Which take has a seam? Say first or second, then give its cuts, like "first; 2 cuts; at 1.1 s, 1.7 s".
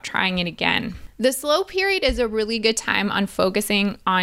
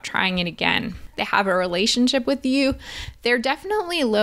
second; 1 cut; at 1.1 s